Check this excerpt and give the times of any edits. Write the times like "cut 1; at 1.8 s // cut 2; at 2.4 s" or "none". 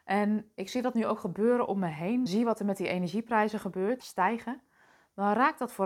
cut 1; at 2.3 s // cut 2; at 4.0 s